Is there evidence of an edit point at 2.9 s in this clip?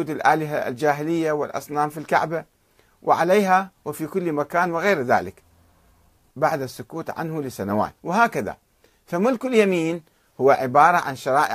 no; 2 cuts; at 6.3 s, 8.0 s

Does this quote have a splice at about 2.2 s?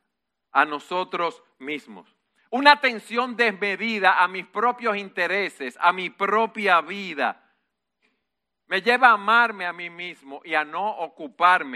no; 0 cuts

